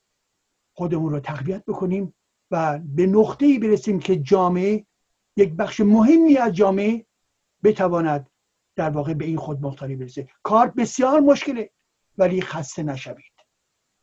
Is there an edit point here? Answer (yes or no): no